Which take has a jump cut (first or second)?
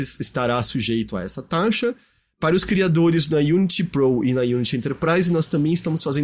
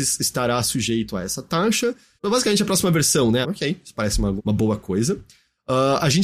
second